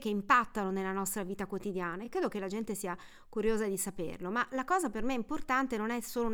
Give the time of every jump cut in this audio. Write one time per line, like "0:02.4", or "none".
none